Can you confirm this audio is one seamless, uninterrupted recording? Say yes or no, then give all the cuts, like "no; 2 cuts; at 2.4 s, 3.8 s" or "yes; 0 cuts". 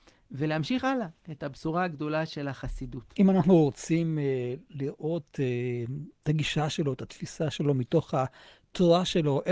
yes; 0 cuts